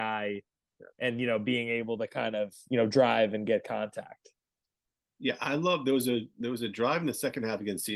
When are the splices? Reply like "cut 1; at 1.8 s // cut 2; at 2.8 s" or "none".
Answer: none